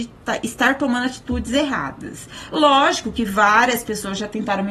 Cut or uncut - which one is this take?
uncut